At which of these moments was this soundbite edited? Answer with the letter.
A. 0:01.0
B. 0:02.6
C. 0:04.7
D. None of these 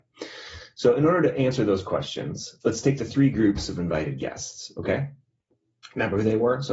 B